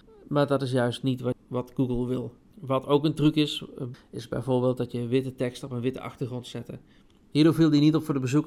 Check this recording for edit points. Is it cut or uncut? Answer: cut